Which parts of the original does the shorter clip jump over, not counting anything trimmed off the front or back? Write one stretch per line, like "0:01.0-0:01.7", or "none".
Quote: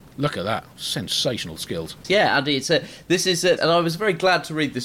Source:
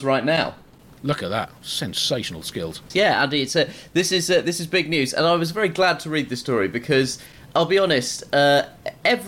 0:04.4-0:05.1